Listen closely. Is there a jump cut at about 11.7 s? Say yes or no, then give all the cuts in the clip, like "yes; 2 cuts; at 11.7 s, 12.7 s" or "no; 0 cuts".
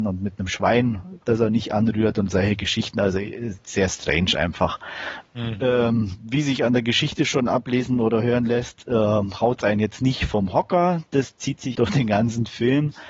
yes; 2 cuts; at 5.3 s, 11.7 s